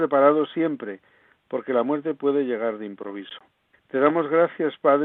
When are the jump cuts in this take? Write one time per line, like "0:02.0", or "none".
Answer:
0:03.7

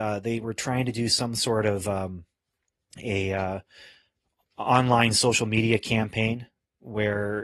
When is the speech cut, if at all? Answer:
none

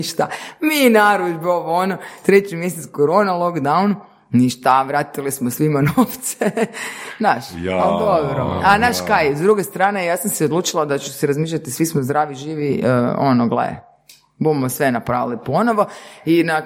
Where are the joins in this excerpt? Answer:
none

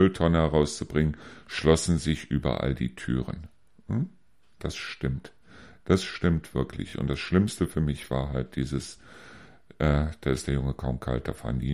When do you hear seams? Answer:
none

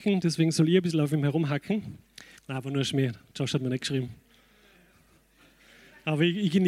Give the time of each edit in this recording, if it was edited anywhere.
0:02.3

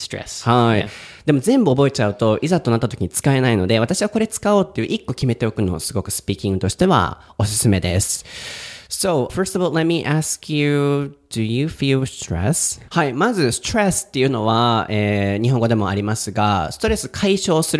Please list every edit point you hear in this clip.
0:09.3
0:12.9

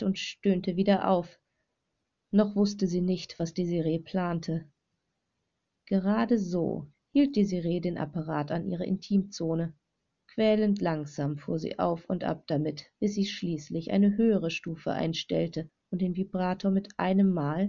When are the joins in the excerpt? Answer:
0:06.9

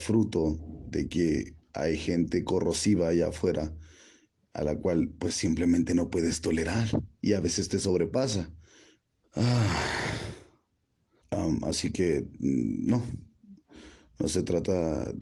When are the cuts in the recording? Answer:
0:09.2
0:11.2

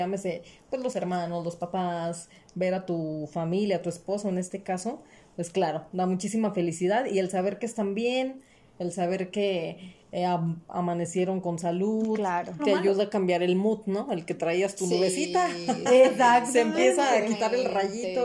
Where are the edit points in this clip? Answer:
0:12.6

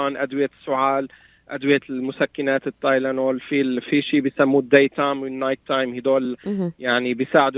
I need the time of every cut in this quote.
none

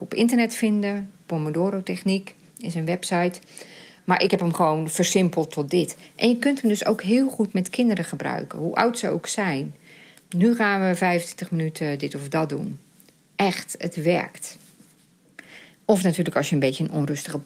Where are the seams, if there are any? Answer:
none

